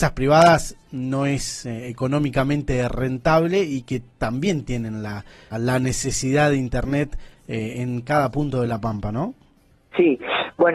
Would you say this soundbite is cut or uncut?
cut